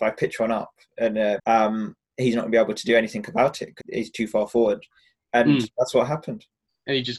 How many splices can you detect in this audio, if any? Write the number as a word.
two